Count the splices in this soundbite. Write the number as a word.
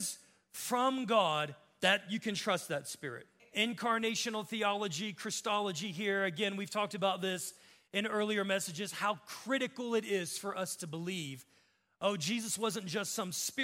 one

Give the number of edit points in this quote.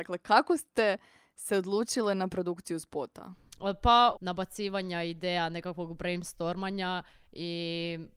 one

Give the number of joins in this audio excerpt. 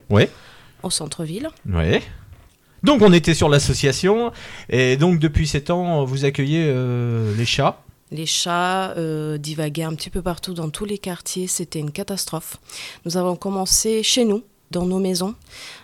two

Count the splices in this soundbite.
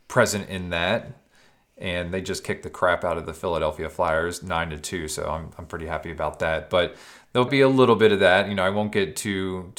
one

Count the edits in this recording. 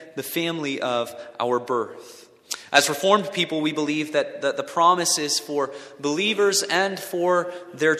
zero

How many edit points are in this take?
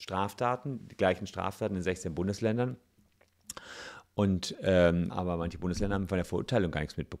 one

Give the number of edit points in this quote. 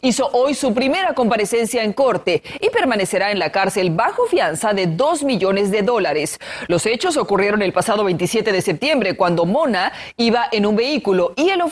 zero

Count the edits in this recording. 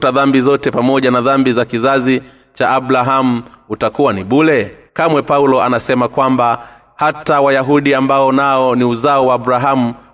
one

